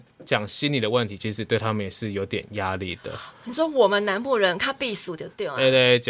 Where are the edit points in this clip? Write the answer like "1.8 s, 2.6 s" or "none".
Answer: none